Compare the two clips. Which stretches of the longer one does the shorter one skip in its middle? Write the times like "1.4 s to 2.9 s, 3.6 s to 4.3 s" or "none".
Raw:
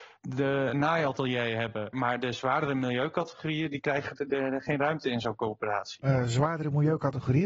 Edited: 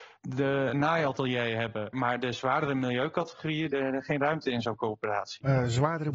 3.7 s to 4.3 s

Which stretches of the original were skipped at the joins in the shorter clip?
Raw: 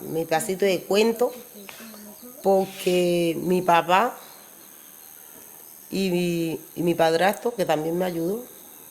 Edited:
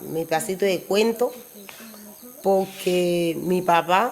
none

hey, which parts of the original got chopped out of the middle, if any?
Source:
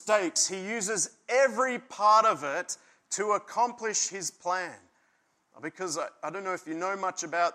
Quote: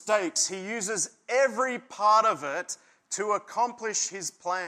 none

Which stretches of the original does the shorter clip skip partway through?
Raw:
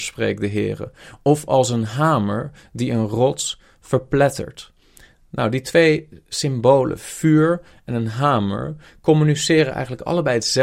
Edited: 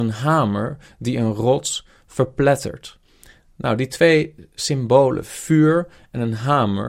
none

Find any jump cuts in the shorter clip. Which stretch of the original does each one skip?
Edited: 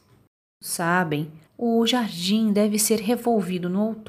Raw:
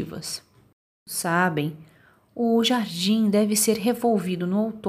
1.9 s to 2.2 s

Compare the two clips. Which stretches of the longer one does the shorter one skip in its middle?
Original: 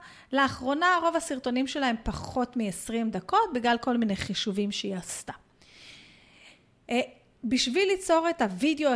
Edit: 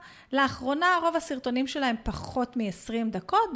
none

